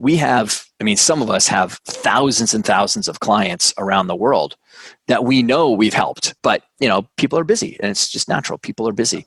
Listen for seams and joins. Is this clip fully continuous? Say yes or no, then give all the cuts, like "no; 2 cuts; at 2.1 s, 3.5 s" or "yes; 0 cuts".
no; 1 cut; at 6.4 s